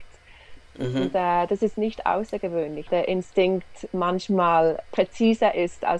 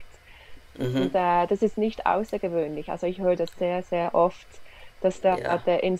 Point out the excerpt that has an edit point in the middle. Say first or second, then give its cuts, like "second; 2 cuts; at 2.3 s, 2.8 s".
first; 1 cut; at 2.9 s